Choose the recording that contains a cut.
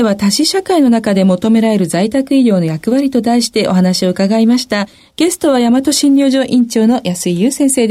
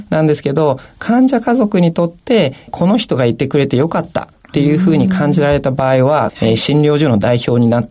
second; 1 cut; at 6.3 s

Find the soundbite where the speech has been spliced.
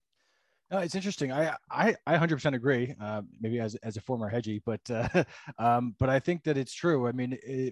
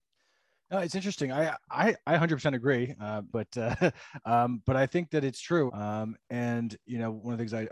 second; 2 cuts; at 3.3 s, 5.7 s

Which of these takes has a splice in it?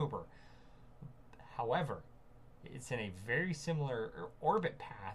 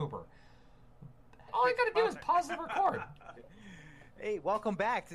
second; 2 cuts; at 1.5 s, 3.4 s

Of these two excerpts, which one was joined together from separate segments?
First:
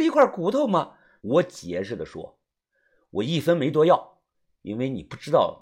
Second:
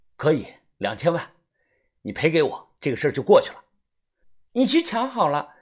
first; 1 cut; at 1.2 s

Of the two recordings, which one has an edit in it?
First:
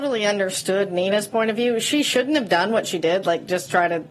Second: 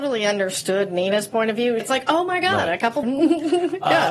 second; 2 cuts; at 1.8 s, 3.0 s

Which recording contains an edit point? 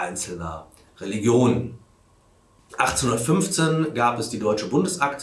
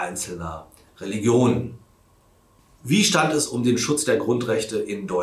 first; 1 cut; at 2.7 s

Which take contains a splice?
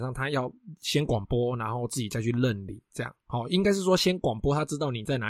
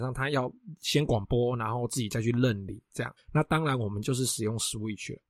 second; 1 cut; at 3.2 s

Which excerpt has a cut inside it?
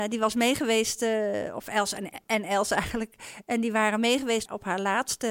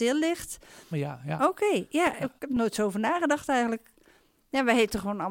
second; 2 cuts; at 0.9 s, 2.4 s

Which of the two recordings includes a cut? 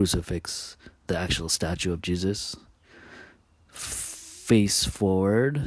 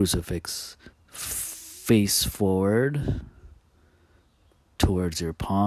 second; 1 cut; at 0.9 s

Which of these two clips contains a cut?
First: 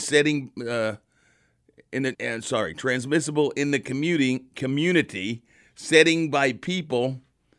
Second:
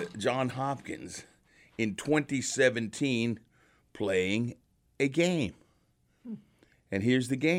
first; 1 cut; at 2.1 s

